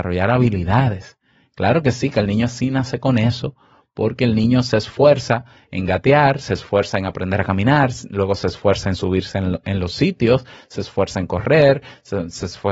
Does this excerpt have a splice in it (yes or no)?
no